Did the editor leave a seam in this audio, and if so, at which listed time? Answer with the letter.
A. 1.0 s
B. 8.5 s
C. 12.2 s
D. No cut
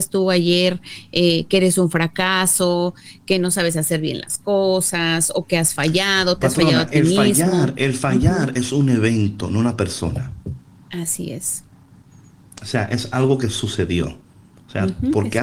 D